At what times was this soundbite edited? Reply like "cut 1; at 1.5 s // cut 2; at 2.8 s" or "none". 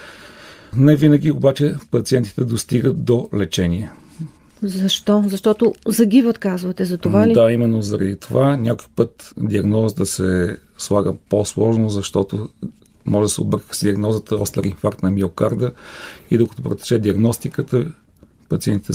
cut 1; at 9.3 s